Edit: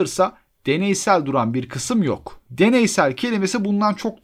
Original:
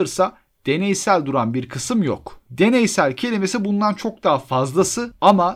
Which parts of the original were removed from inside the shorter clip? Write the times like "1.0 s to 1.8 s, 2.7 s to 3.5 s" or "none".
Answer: none